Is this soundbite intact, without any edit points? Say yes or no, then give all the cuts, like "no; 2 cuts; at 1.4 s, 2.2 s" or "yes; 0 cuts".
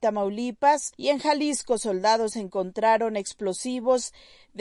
yes; 0 cuts